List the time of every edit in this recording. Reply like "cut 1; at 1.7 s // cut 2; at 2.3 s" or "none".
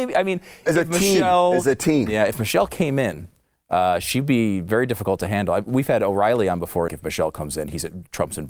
cut 1; at 6.9 s

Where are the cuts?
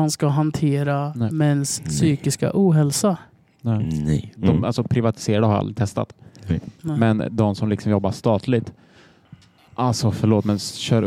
cut 1; at 4.4 s

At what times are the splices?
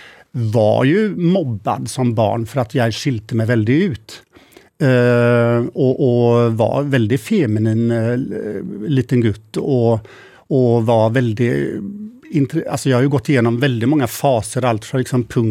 none

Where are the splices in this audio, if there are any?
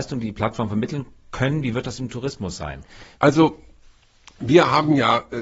cut 1; at 3.2 s

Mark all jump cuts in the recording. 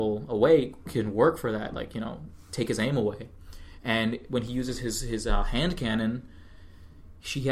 none

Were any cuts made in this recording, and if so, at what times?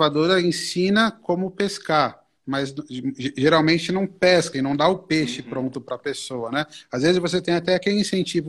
cut 1; at 4.5 s

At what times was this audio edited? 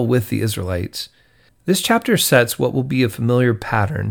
cut 1; at 1.5 s

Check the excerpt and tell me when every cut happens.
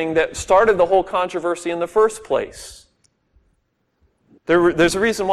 cut 1; at 4.4 s

